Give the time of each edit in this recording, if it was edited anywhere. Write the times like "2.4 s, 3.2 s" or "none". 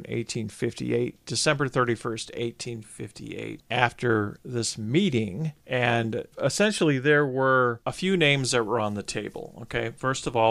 none